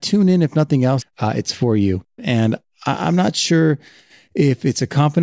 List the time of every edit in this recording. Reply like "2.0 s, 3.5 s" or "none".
1.0 s, 2.2 s